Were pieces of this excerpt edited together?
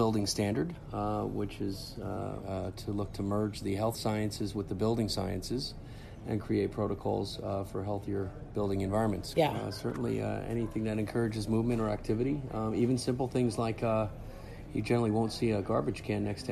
yes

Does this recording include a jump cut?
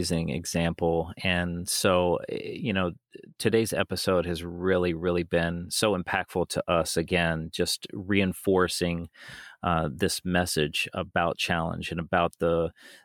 no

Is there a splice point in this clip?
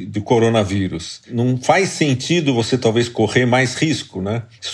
no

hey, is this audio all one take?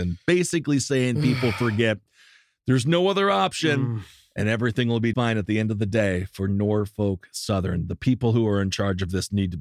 no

